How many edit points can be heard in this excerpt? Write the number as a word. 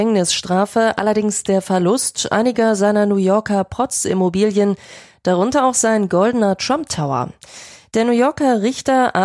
zero